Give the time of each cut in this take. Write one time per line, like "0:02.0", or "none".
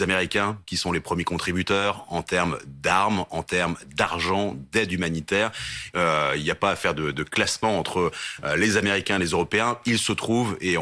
0:05.9